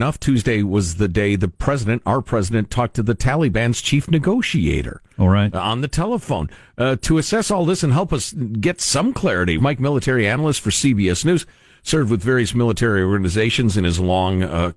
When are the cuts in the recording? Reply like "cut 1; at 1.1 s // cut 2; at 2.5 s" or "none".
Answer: cut 1; at 9.6 s